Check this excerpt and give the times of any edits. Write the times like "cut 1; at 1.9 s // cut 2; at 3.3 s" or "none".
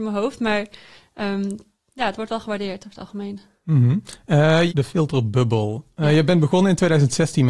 cut 1; at 4.7 s